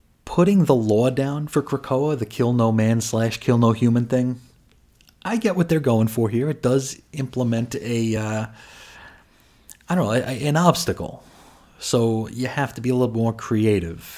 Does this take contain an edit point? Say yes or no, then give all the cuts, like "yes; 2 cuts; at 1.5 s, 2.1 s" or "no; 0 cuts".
no; 0 cuts